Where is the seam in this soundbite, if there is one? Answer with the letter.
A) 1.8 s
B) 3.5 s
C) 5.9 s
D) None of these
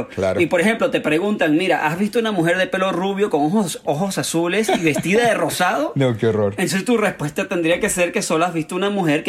D